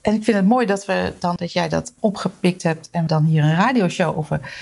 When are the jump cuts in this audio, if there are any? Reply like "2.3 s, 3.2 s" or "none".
1.4 s, 3.1 s

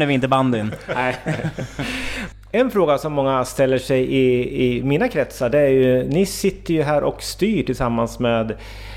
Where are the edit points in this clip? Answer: none

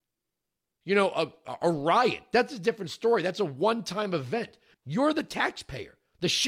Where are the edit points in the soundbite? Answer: 4.7 s

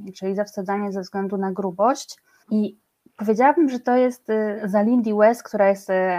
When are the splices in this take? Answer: 2.4 s, 4.6 s

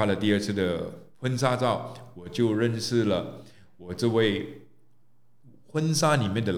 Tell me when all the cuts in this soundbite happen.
1.1 s

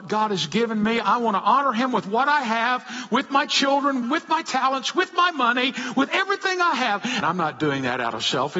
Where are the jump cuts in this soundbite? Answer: 4.0 s, 7.2 s

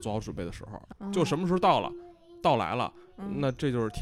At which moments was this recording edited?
0.9 s

